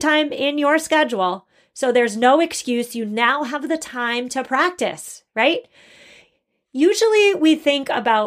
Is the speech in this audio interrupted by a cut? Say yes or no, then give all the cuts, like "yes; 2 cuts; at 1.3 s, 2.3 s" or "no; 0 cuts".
no; 0 cuts